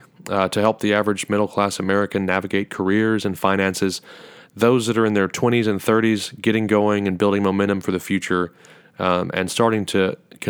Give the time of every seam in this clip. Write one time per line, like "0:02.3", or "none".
none